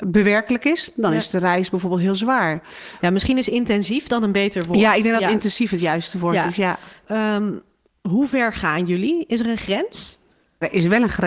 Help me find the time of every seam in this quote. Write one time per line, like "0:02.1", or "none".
0:03.0
0:07.0